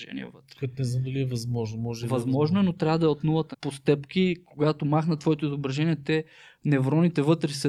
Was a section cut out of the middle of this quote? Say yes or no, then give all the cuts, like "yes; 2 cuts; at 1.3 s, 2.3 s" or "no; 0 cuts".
yes; 1 cut; at 3.5 s